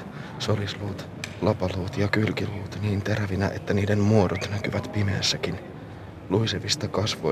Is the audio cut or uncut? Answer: uncut